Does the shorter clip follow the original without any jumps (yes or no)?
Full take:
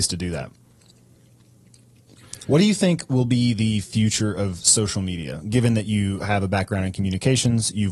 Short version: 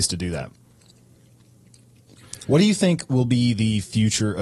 yes